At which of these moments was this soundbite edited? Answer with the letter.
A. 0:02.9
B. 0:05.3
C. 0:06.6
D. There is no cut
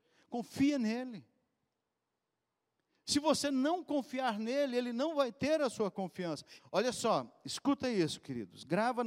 C